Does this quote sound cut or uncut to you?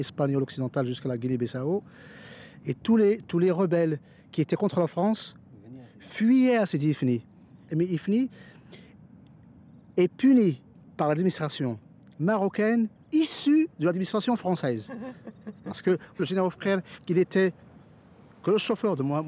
cut